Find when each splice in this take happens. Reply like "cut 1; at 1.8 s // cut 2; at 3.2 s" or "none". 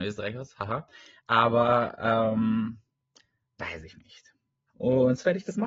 cut 1; at 4.7 s